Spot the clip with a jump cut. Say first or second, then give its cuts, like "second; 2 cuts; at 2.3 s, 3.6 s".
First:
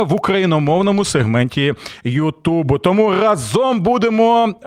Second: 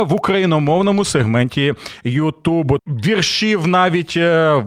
second; 1 cut; at 2.8 s